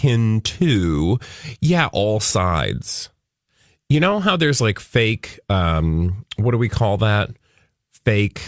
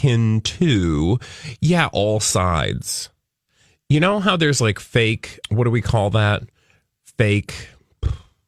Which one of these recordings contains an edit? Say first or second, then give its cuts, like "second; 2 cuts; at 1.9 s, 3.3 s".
second; 1 cut; at 5.4 s